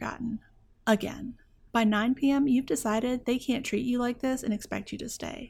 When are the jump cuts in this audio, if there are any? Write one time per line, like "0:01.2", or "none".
0:01.7